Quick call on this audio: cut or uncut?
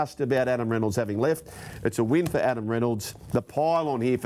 uncut